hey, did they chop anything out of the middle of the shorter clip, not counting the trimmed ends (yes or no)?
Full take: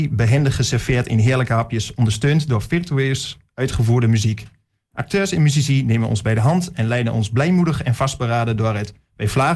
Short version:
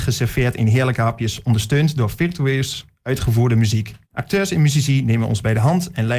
yes